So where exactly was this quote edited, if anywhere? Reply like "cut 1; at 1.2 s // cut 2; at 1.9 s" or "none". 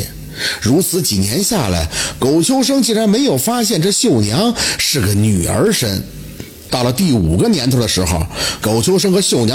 cut 1; at 6.7 s